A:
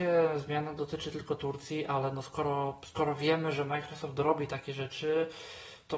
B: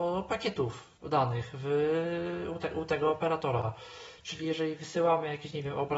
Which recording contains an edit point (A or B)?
B